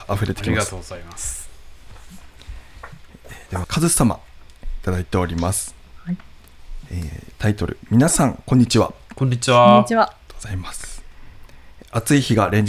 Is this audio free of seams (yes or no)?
no